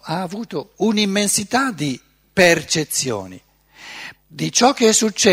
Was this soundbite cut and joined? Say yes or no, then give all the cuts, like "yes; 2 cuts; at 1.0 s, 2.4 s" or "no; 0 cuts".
yes; 1 cut; at 4.1 s